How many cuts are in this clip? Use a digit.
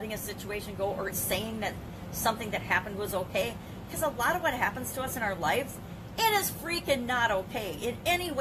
1